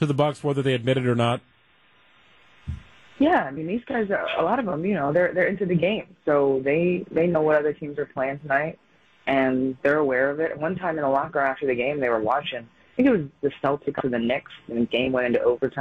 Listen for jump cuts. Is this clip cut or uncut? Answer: uncut